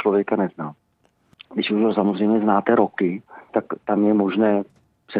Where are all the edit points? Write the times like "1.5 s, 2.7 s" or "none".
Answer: 1.3 s, 3.5 s